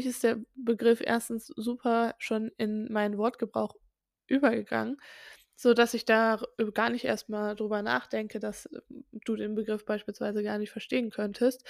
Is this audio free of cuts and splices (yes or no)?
yes